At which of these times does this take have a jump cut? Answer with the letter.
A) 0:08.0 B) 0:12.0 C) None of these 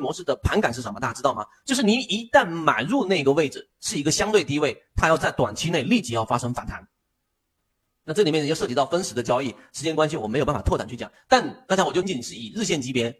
B